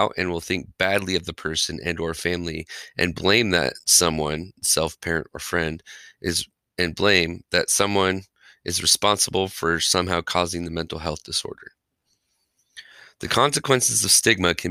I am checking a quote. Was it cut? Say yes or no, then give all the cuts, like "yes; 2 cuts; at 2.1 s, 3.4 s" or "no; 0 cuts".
no; 0 cuts